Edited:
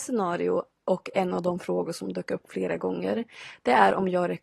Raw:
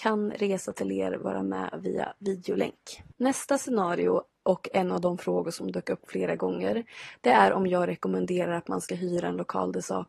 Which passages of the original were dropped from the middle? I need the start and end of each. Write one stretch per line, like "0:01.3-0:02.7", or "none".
none